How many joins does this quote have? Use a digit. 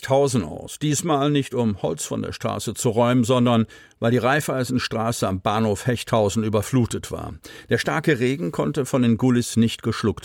0